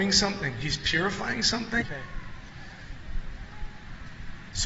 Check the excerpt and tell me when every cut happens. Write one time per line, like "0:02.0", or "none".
0:01.8